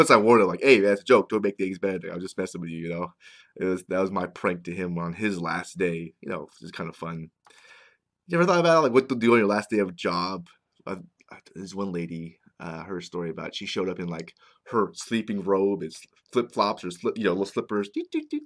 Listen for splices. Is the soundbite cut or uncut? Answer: uncut